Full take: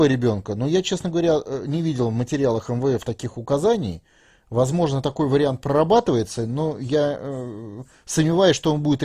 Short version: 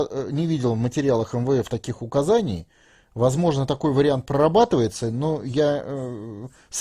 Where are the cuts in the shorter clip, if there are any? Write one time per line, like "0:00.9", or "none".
none